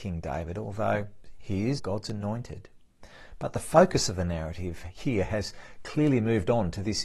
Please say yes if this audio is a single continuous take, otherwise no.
no